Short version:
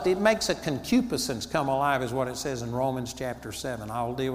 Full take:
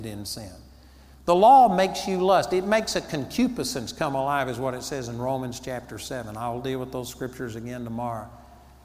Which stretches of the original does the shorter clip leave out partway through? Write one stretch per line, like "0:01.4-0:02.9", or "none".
none